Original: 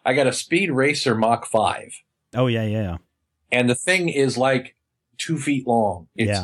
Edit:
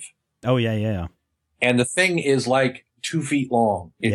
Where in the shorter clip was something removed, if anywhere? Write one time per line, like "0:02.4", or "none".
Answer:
0:02.9